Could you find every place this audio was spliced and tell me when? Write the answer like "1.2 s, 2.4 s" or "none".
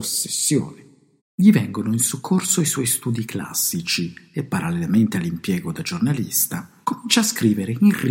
1.2 s, 6.8 s